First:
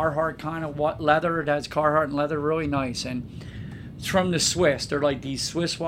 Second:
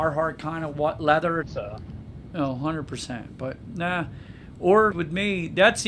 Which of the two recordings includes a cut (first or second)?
second